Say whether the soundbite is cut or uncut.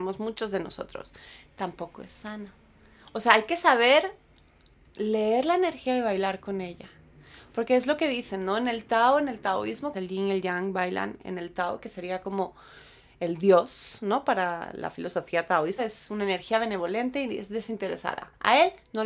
cut